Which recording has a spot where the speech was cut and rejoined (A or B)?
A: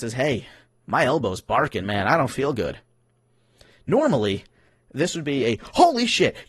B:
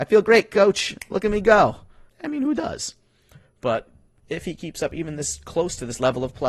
B